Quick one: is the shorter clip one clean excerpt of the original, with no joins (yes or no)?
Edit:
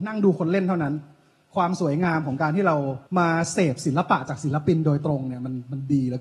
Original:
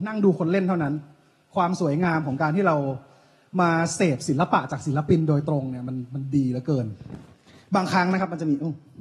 no